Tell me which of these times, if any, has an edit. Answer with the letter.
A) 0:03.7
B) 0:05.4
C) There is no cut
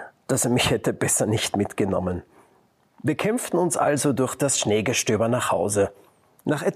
C